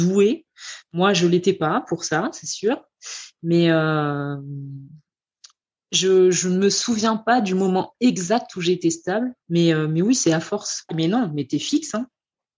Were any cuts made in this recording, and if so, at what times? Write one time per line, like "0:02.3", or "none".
0:09.4
0:10.9